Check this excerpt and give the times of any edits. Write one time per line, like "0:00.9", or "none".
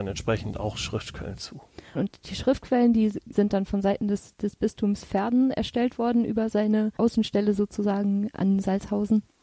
0:02.0